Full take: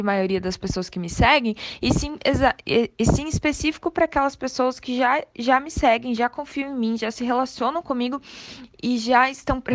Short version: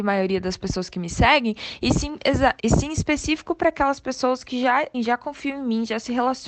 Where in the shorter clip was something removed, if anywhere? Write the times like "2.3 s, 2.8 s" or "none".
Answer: 2.6 s, 4.9 s